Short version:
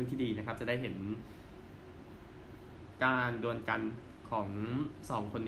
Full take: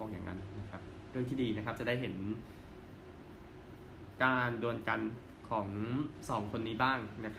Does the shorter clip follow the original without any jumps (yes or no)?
yes